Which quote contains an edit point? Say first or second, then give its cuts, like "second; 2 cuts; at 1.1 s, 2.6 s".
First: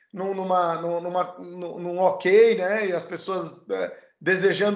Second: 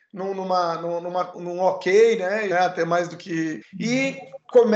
second; 3 cuts; at 1.3 s, 2.5 s, 3.6 s